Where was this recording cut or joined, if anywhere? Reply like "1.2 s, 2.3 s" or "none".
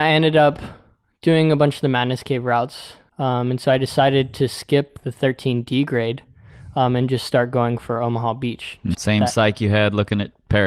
3.1 s, 8.9 s

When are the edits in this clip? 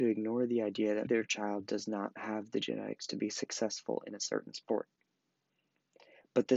1.1 s

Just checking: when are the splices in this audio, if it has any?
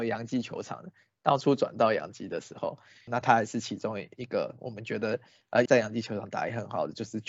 3.1 s, 5.7 s

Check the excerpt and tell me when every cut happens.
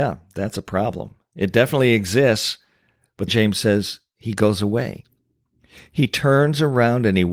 3.3 s

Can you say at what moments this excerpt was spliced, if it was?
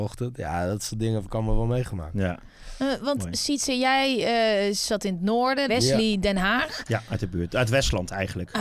5.7 s

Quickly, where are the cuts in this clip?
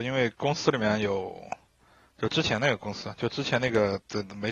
none

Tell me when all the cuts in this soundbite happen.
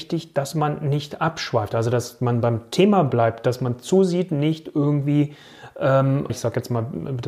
6.3 s

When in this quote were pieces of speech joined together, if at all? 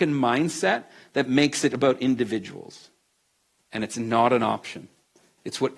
3.6 s

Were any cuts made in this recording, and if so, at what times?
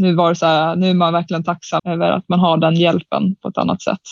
1.8 s

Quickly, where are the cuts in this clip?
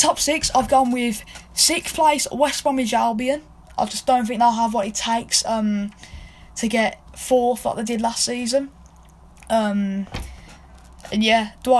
none

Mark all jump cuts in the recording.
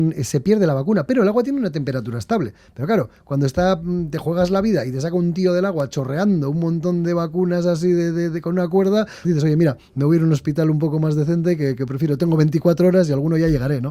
9.2 s

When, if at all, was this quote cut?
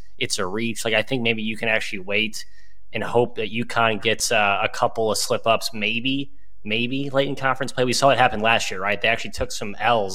none

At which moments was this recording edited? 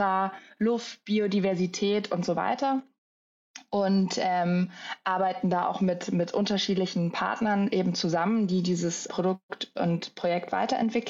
9.1 s

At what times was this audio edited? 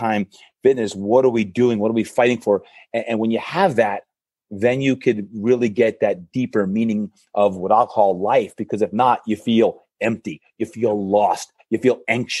none

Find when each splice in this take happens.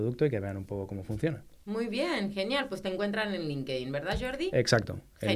none

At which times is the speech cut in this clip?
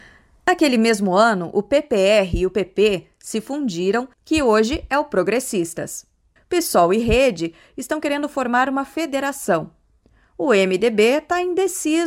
4.1 s, 6.4 s

